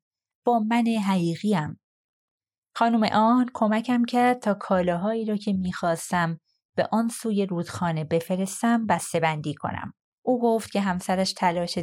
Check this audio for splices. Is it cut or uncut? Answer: cut